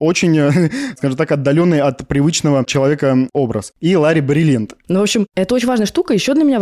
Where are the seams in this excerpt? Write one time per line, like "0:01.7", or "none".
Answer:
0:04.8